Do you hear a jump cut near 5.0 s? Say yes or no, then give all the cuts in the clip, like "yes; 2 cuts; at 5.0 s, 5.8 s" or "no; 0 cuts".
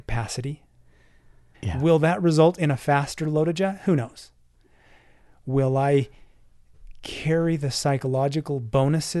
no; 1 cut; at 1.5 s